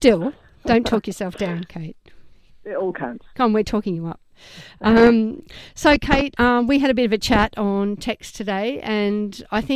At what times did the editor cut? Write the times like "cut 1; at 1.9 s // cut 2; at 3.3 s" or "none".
none